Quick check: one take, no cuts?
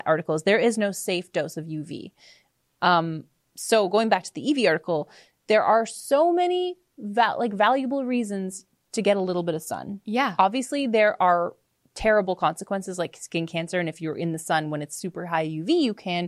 yes; 0 cuts

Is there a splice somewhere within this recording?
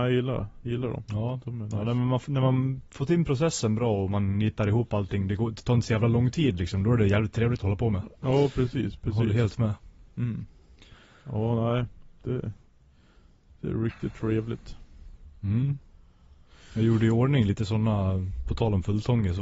no; 0 cuts

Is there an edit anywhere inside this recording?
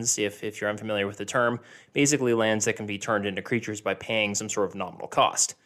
no; 0 cuts

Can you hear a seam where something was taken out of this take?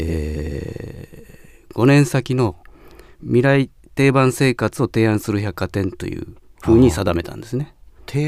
no; 0 cuts

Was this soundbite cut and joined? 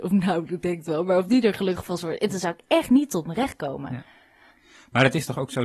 no; 0 cuts

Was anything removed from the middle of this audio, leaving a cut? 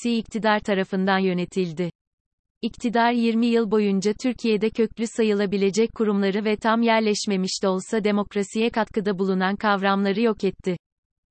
yes; 1 cut; at 2.5 s

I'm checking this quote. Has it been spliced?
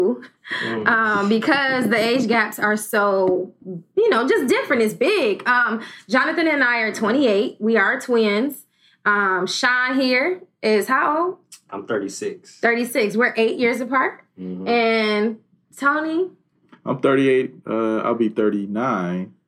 no; 0 cuts

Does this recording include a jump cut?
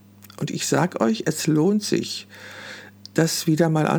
no; 0 cuts

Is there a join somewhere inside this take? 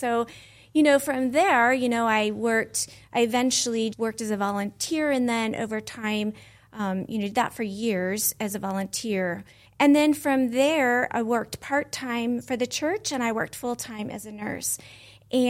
yes; 3 cuts; at 3.9 s, 9.6 s, 11.1 s

